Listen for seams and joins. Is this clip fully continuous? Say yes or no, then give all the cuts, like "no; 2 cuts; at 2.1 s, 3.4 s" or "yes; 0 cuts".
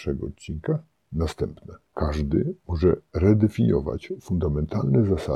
no; 1 cut; at 1.0 s